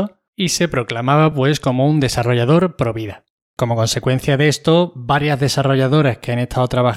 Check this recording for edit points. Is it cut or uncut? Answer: uncut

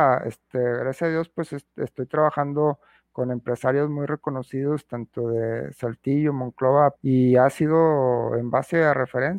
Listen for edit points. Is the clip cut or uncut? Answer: cut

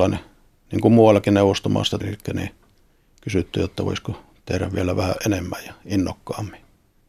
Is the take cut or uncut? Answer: cut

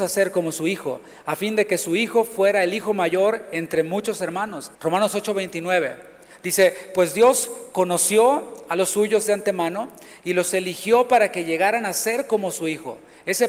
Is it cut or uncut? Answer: cut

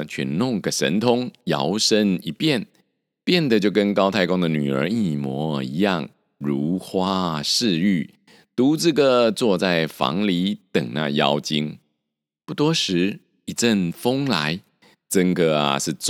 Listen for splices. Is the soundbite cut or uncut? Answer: uncut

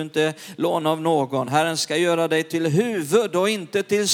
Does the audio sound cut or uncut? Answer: uncut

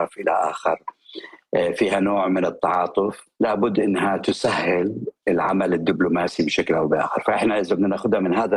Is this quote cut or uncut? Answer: cut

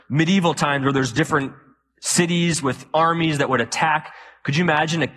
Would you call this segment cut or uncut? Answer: uncut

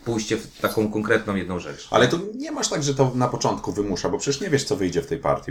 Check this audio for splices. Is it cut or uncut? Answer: uncut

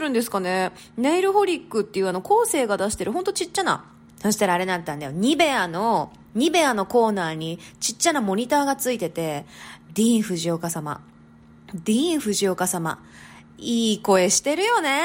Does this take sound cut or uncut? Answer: cut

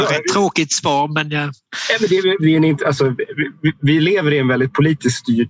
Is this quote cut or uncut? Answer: uncut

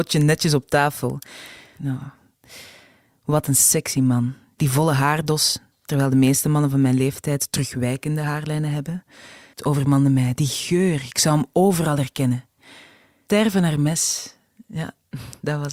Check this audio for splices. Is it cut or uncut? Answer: cut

